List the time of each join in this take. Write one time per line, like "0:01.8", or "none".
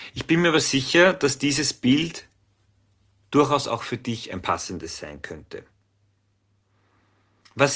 none